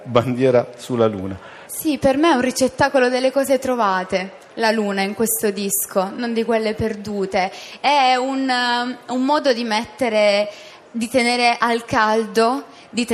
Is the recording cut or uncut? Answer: cut